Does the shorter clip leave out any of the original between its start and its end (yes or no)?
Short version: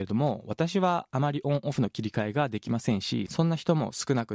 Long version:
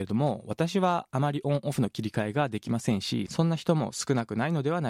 no